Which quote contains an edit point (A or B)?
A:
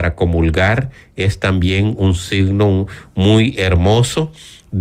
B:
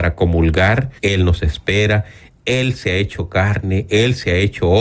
B